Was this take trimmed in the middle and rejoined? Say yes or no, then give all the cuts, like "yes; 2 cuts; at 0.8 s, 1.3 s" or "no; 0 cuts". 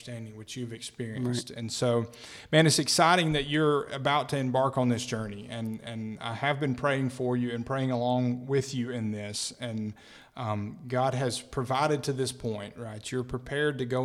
no; 0 cuts